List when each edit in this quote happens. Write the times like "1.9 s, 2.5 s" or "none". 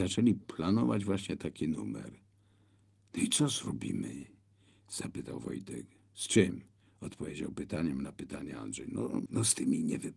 9.3 s